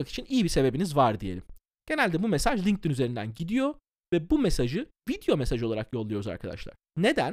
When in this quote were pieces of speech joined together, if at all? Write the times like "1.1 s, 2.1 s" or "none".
none